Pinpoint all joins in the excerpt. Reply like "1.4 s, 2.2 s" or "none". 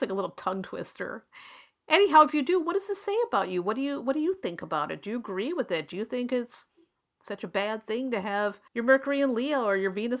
8.7 s